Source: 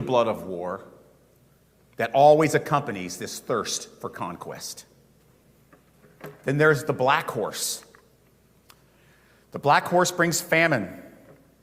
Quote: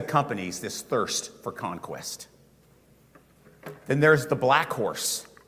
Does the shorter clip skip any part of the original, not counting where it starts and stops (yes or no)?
no